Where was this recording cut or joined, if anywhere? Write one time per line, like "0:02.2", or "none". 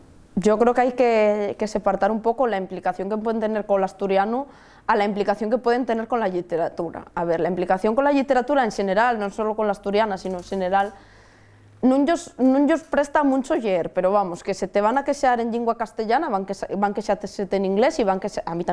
none

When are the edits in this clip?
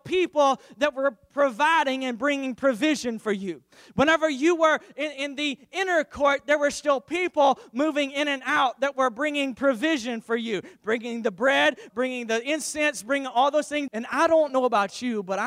0:11.9
0:13.9

